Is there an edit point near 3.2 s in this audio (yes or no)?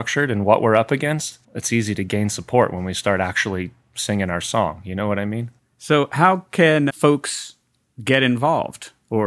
no